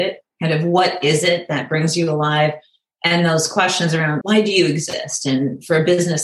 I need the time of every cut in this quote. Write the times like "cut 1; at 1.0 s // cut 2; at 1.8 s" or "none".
cut 1; at 4.2 s